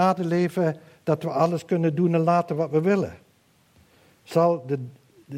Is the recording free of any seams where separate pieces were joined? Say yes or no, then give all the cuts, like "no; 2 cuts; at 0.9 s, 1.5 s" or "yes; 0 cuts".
yes; 0 cuts